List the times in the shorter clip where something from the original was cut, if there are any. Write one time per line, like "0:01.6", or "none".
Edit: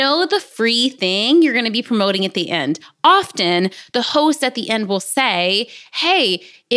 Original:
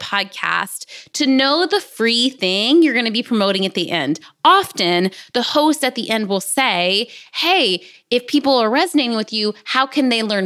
none